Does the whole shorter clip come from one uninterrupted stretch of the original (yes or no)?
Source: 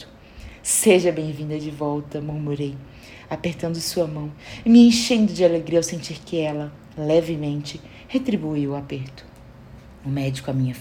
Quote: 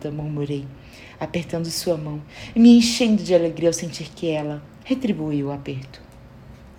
no